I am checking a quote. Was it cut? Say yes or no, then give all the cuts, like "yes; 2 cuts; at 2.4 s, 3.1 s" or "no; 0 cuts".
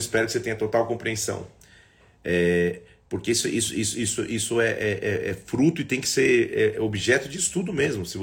no; 0 cuts